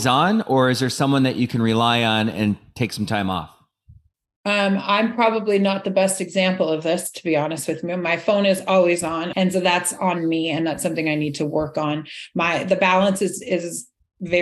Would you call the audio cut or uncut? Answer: cut